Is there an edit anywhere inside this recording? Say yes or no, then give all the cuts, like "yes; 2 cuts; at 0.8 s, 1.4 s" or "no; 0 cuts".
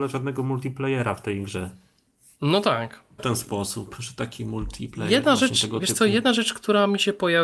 yes; 1 cut; at 3.2 s